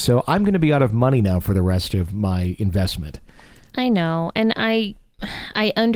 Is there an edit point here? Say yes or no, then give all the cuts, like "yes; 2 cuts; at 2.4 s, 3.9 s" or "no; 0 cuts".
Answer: no; 0 cuts